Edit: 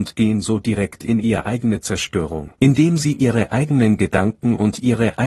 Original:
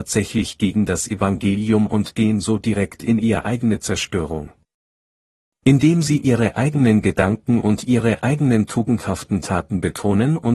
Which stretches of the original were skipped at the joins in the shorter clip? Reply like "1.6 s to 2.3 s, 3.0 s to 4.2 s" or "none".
4.5 s to 5.6 s